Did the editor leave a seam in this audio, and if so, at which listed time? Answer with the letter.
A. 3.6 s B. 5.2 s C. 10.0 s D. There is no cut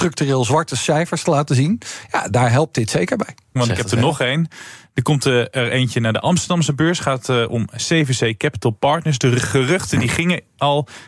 A